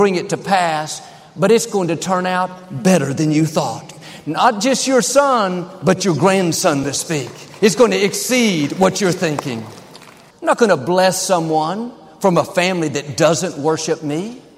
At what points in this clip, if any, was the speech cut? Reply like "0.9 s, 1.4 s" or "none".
6.8 s, 10.3 s

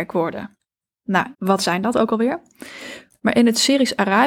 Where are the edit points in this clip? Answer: 1.3 s, 3.1 s

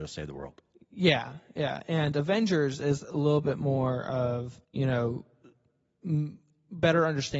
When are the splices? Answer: 4.6 s

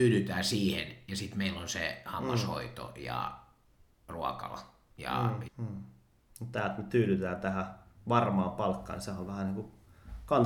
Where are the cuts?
5.5 s

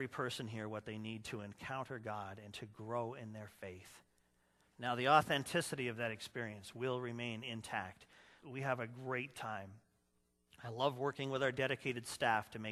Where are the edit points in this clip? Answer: 4.7 s, 8.4 s

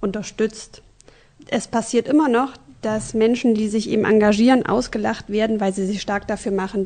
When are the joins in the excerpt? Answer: none

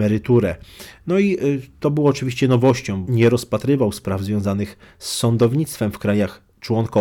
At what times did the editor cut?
3.1 s

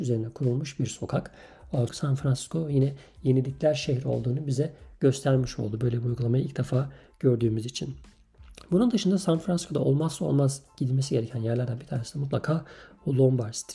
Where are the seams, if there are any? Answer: 1.9 s

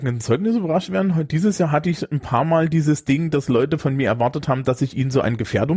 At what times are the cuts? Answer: none

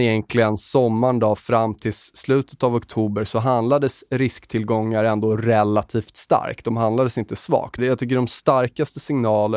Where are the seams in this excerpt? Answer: 7.8 s

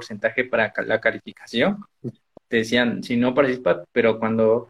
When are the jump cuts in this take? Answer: 2.4 s

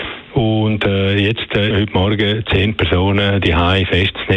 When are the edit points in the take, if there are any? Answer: 1.7 s

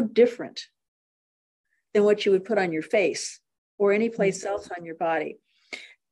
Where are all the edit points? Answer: none

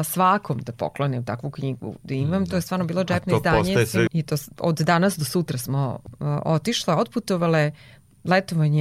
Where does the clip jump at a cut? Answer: 4.1 s

